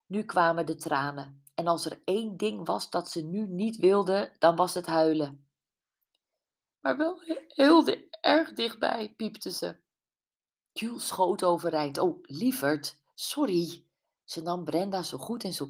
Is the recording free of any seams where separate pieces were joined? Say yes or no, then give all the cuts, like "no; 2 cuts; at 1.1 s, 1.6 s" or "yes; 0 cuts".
yes; 0 cuts